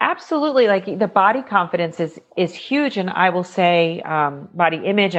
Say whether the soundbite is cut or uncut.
uncut